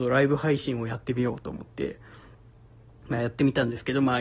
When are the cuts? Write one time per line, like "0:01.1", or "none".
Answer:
none